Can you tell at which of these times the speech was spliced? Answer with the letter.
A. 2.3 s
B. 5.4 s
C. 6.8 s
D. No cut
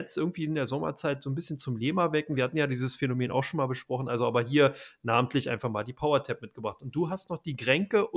D